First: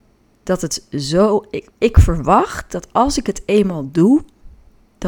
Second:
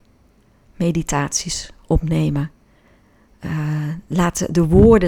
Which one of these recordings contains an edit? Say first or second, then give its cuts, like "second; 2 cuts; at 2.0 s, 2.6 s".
first; 1 cut; at 1.7 s